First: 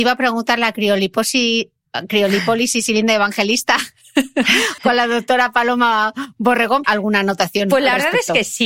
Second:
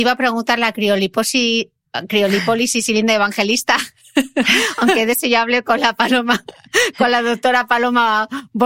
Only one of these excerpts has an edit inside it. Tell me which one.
first; 2 cuts; at 4.8 s, 6.8 s

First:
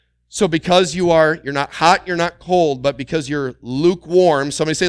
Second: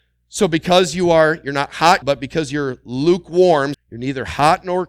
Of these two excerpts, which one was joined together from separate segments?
second; 2 cuts; at 2.0 s, 3.7 s

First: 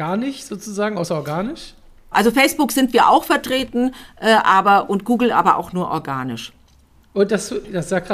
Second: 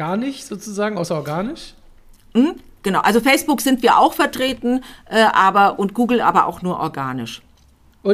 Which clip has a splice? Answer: first; 1 cut; at 2.1 s

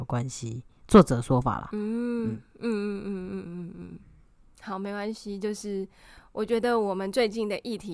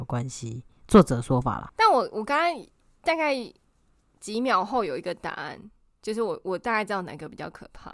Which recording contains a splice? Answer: second; 1 cut; at 1.7 s

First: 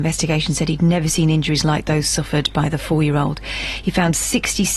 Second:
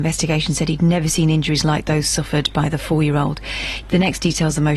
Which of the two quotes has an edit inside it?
second; 1 cut; at 3.8 s

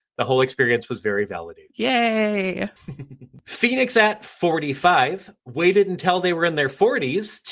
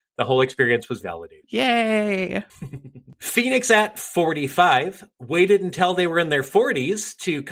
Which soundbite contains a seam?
second; 1 cut; at 1.0 s

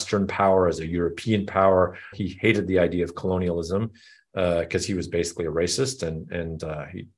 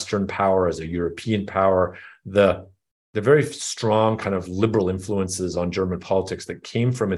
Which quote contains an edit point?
first; 1 cut; at 2.1 s

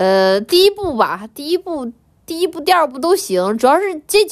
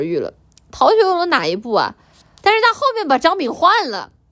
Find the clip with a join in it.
second; 1 cut; at 2.4 s

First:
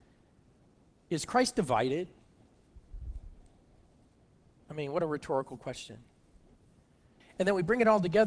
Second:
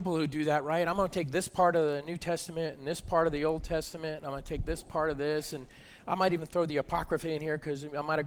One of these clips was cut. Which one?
first; 1 cut; at 7.2 s

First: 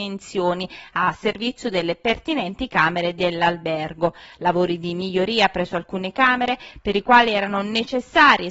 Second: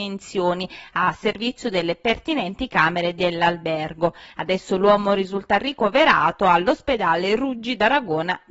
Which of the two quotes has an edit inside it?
second; 1 cut; at 4.3 s

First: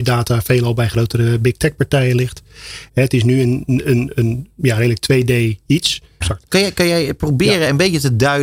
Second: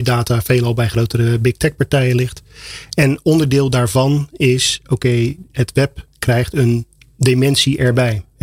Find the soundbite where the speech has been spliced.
first; 2 cuts; at 2.9 s, 6.2 s

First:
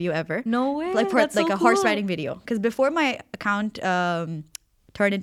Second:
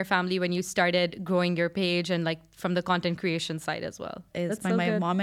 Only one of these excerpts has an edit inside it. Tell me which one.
second; 1 cut; at 4.3 s

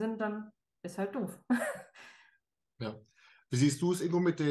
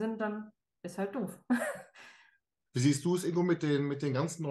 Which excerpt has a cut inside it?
second; 1 cut; at 2.7 s

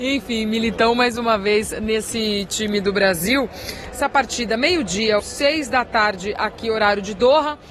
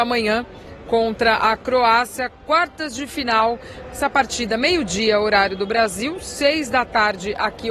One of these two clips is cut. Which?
first; 2 cuts; at 3.9 s, 5.2 s

